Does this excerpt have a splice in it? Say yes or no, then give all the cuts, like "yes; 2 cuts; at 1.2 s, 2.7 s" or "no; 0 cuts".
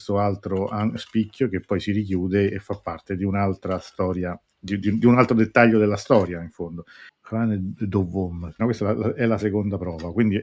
yes; 2 cuts; at 7.1 s, 8.6 s